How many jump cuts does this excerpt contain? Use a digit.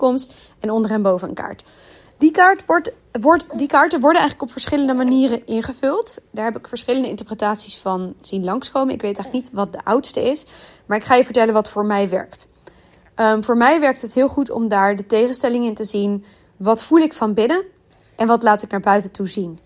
0